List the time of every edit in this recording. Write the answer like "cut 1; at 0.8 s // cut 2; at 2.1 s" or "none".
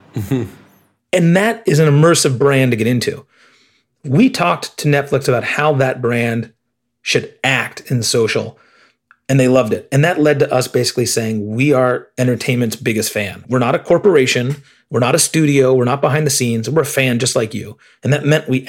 none